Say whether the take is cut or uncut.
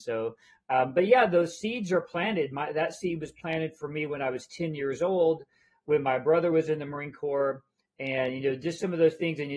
uncut